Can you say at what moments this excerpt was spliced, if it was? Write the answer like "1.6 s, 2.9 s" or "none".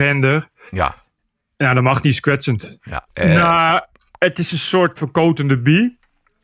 3.1 s, 5.0 s

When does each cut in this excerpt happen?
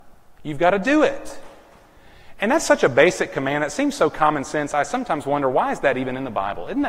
none

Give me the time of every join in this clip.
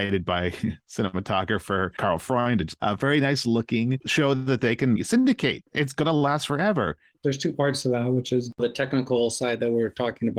2.8 s

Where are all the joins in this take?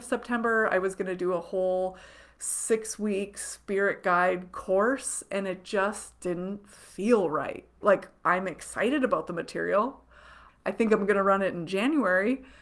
7.8 s, 10.5 s

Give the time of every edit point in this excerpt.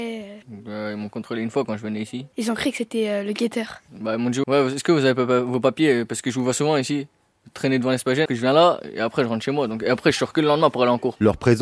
4.4 s, 8.3 s

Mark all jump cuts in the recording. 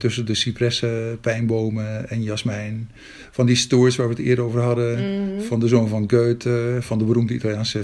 none

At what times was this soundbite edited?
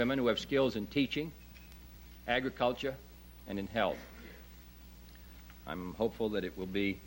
none

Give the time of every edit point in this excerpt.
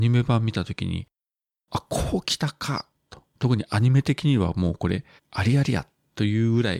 3.3 s, 5.2 s

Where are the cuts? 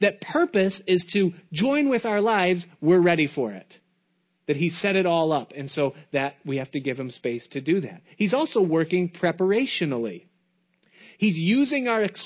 none

